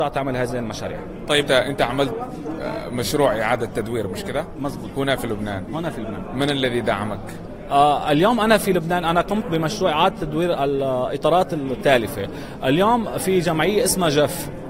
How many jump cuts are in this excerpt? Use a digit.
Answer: 1